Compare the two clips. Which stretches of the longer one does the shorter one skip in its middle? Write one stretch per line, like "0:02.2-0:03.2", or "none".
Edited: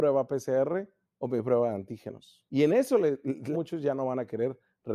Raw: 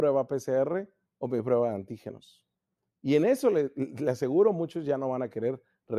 0:02.5-0:03.0
0:04.0-0:04.6